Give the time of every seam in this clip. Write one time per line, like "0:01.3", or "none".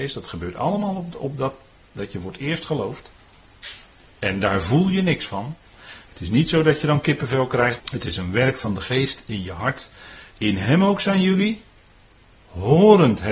0:06.1
0:07.8
0:10.3